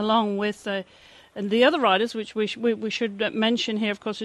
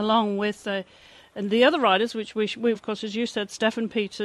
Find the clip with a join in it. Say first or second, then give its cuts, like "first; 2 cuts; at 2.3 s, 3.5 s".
second; 1 cut; at 2.7 s